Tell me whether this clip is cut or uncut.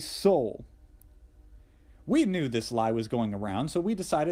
uncut